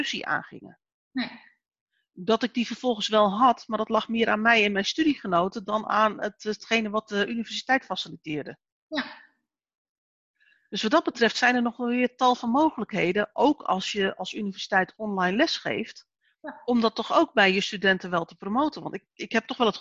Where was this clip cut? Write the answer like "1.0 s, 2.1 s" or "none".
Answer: none